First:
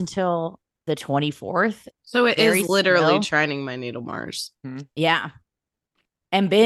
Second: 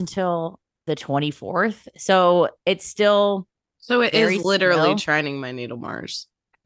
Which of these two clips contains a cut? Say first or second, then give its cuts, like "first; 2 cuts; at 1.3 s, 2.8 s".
first; 2 cuts; at 1.9 s, 4.6 s